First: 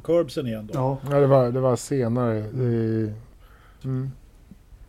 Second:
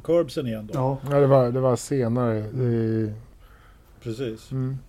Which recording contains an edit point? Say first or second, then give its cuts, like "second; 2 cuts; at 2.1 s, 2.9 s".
first; 1 cut; at 3.8 s